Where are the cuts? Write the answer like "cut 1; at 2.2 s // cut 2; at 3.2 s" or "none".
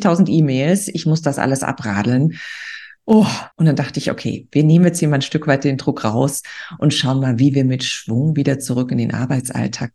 cut 1; at 3.5 s